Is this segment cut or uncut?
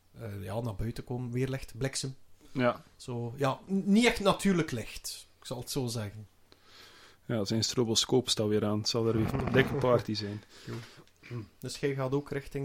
uncut